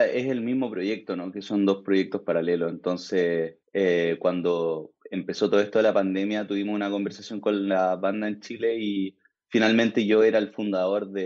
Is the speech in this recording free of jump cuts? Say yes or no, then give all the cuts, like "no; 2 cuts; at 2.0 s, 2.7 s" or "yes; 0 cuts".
no; 1 cut; at 3.6 s